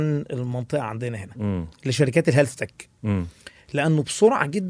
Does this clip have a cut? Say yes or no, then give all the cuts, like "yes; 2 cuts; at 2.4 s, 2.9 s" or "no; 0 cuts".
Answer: no; 0 cuts